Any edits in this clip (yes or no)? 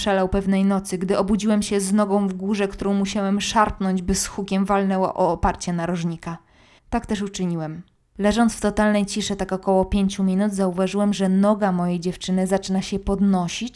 yes